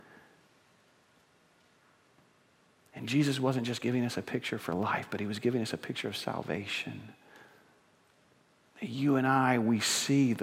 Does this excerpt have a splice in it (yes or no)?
no